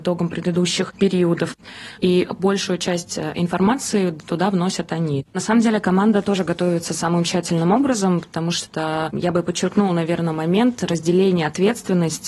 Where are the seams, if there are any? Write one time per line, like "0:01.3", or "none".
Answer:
0:02.0
0:05.3